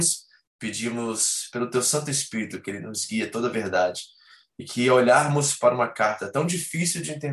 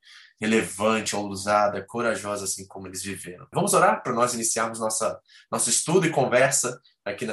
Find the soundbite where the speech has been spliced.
second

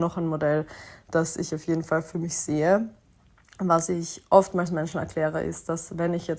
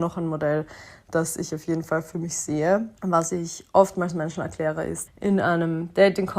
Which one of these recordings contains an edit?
second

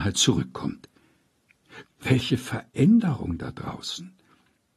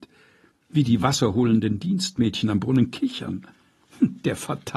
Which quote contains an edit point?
first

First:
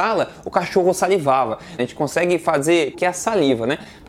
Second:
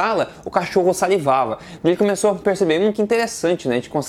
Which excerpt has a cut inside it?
first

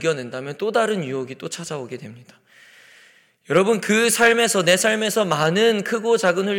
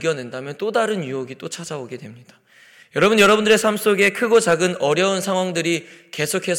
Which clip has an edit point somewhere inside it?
second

